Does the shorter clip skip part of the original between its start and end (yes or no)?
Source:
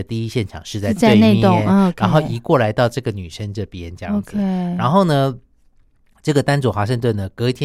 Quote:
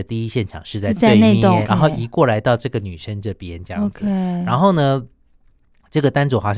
yes